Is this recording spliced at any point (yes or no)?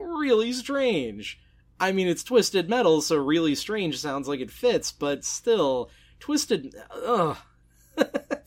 no